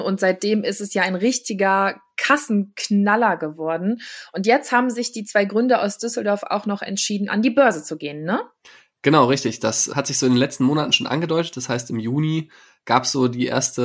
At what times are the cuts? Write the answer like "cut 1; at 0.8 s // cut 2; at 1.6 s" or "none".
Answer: none